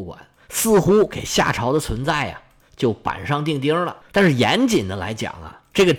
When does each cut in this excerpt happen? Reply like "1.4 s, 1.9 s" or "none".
none